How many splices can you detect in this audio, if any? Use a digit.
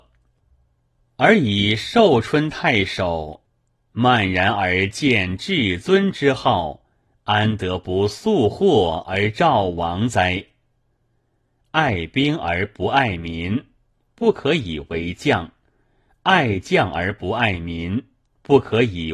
0